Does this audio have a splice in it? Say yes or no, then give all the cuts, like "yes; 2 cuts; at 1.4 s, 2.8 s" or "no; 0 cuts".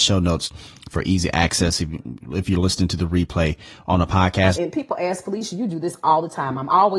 yes; 1 cut; at 4.6 s